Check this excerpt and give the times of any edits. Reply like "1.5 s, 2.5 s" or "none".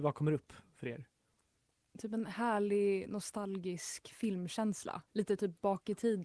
5.1 s